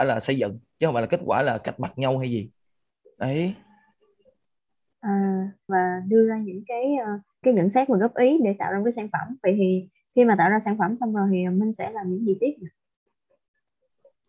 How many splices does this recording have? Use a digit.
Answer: 2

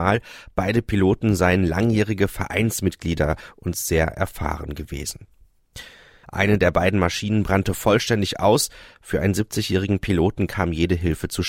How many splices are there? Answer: 1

